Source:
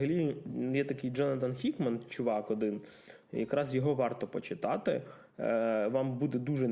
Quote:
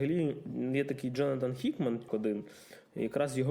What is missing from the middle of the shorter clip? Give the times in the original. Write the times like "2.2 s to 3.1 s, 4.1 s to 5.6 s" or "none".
2.1 s to 2.5 s

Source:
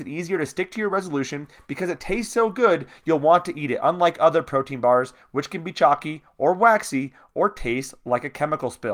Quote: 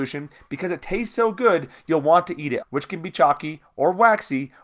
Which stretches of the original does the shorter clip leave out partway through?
3.8 s to 5.2 s

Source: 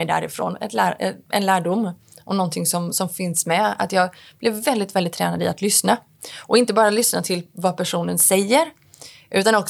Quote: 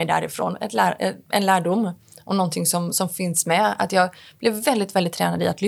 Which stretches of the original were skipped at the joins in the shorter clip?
none

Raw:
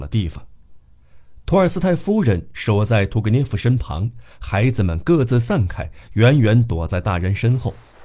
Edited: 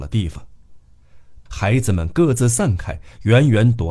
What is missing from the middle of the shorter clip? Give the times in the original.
1.5 s to 4.4 s

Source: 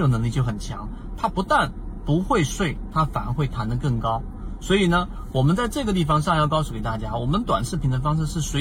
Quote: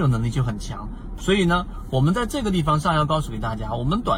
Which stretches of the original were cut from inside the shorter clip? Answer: 1.2 s to 4.6 s

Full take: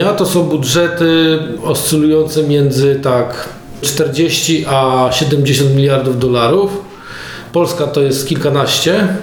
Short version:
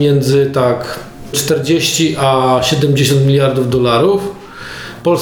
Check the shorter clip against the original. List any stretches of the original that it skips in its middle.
none

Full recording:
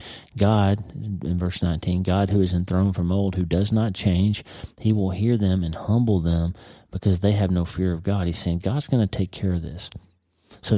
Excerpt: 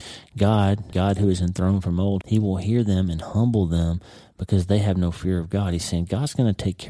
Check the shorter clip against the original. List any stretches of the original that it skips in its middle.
0.9 s to 2.0 s, 3.3 s to 4.7 s

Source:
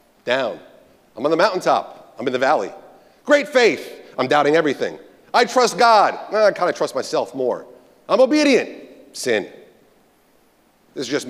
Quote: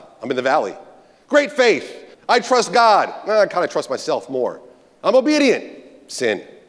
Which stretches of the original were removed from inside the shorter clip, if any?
4.1 s to 5.2 s

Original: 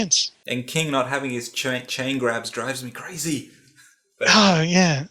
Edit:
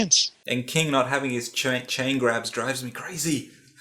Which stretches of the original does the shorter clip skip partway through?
none

